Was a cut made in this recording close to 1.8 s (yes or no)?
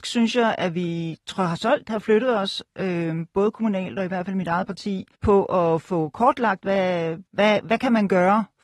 no